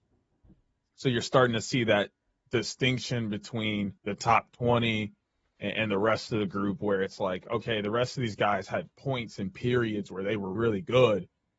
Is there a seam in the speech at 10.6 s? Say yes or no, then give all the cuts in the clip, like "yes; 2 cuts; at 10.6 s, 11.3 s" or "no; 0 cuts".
yes; 2 cuts; at 4.0 s, 10.6 s